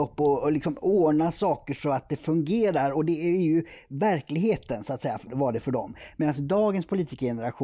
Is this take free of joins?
no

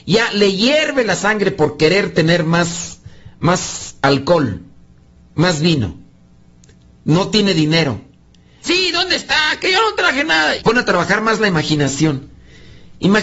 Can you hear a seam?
yes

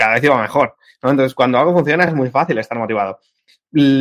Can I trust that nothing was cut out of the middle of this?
yes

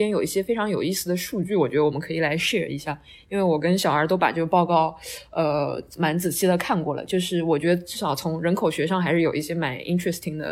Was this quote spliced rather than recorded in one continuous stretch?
no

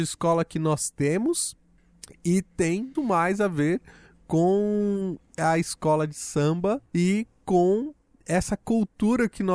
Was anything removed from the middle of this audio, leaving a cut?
yes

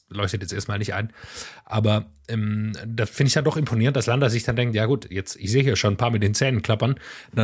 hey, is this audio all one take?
yes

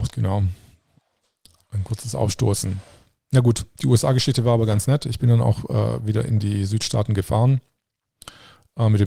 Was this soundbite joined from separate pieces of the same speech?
no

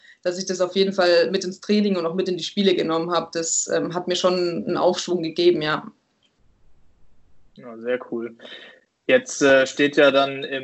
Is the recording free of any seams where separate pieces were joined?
yes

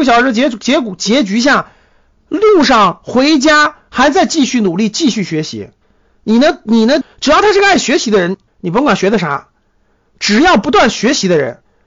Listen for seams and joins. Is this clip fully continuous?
no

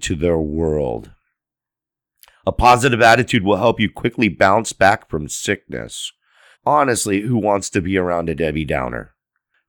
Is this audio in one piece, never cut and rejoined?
no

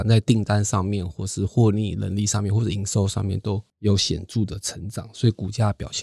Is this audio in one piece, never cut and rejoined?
yes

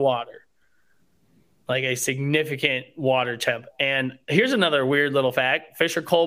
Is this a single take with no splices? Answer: yes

